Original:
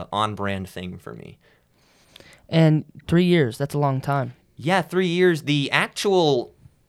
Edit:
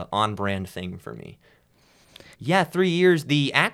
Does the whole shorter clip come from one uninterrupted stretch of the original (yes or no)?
no